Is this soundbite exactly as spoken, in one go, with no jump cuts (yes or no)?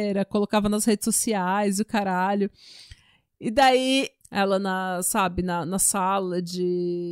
no